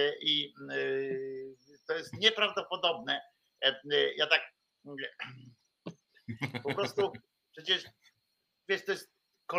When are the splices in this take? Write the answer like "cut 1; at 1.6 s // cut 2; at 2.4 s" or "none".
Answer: none